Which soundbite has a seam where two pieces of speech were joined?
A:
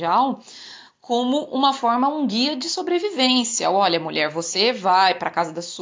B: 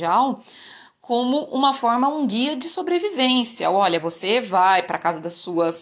B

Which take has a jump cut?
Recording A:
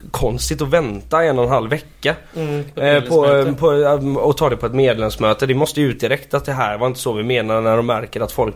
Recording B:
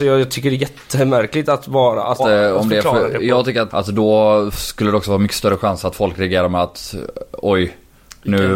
B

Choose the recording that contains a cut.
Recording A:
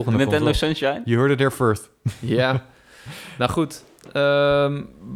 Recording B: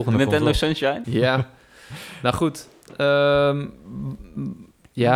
B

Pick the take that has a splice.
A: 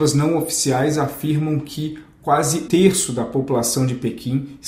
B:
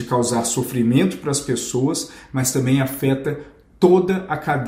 A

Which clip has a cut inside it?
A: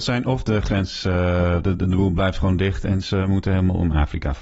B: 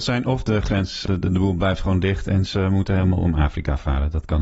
B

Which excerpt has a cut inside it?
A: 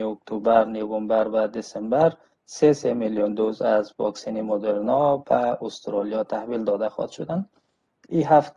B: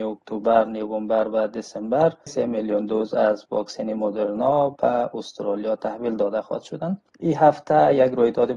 B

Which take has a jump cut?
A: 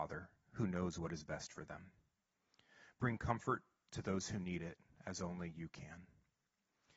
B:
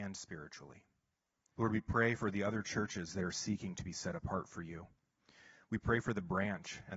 B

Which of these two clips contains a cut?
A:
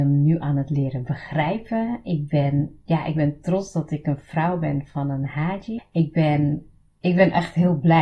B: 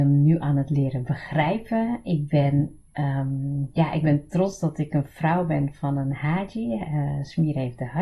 A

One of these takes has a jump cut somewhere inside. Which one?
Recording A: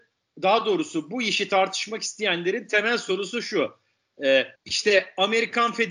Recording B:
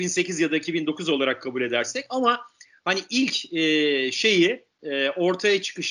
A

